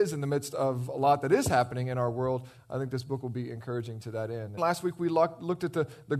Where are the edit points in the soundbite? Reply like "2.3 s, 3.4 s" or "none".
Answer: 4.6 s